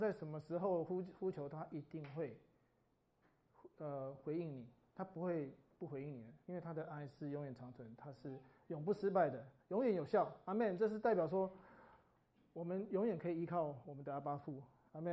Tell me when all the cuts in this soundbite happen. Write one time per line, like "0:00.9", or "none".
0:09.6